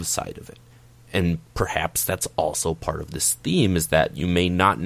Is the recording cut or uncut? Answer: cut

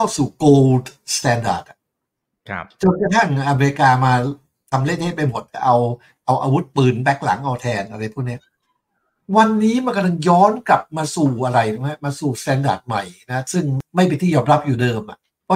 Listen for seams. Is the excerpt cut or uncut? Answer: uncut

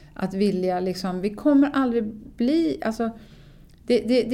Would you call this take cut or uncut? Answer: uncut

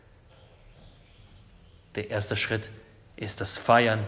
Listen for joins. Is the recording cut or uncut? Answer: uncut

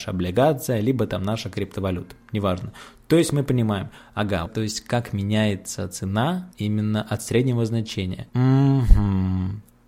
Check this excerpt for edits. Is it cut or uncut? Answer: cut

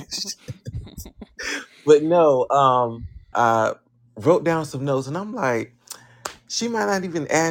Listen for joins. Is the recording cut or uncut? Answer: cut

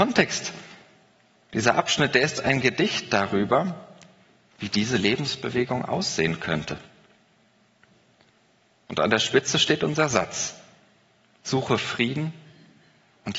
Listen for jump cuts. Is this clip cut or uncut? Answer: uncut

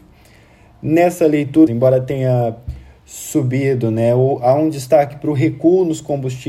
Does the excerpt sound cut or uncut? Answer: cut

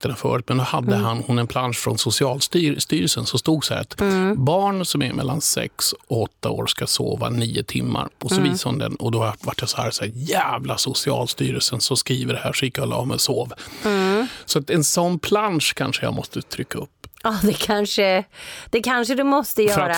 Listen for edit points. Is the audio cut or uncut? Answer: cut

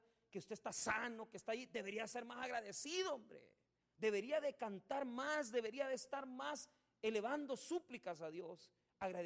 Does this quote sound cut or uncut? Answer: cut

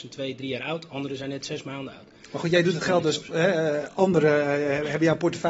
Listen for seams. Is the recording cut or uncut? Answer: uncut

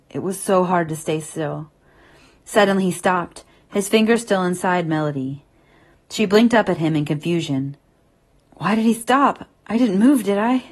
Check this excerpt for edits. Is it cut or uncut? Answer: uncut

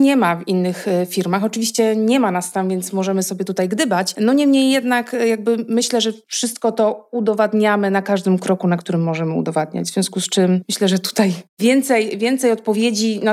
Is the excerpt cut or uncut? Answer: uncut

